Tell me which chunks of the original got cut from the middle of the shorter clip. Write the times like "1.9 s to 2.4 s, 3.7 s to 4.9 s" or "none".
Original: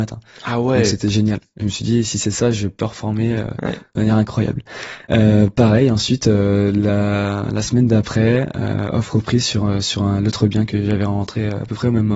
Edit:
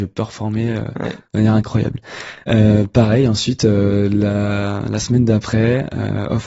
none